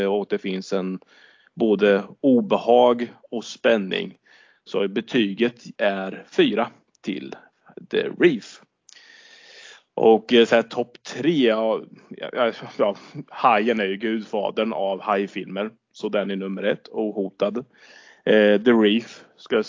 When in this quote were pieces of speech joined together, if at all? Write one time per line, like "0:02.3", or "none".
none